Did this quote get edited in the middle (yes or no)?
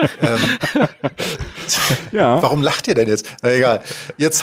no